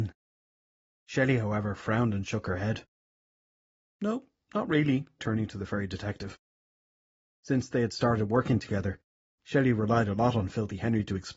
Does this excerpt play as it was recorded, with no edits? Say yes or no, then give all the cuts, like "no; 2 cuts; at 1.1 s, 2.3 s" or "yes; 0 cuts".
no; 1 cut; at 5.2 s